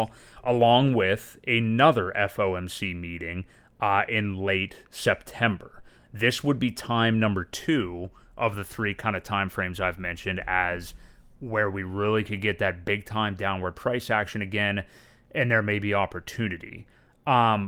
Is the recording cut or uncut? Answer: uncut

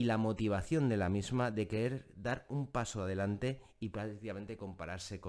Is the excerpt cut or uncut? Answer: uncut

